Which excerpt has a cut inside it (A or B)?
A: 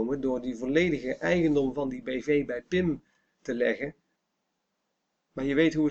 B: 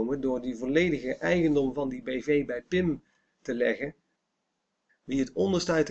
B